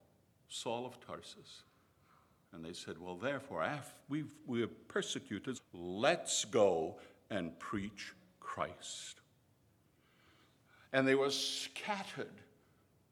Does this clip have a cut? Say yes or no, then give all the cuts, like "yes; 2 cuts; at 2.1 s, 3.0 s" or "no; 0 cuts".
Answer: yes; 1 cut; at 5.5 s